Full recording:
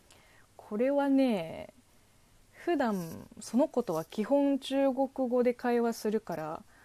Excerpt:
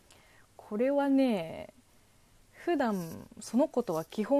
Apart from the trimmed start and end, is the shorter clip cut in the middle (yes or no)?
no